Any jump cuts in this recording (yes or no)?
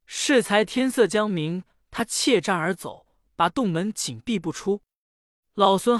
no